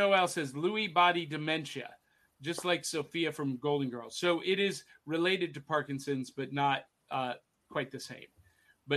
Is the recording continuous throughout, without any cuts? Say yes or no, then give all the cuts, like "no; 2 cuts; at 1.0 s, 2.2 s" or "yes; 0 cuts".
yes; 0 cuts